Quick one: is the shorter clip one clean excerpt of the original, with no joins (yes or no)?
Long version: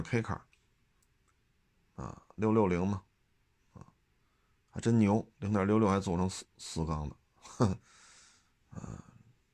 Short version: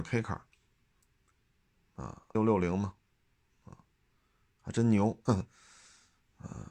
no